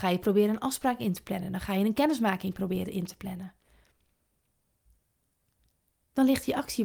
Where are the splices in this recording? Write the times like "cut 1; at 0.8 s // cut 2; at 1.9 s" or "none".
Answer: none